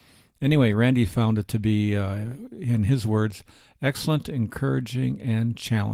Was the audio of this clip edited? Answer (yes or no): no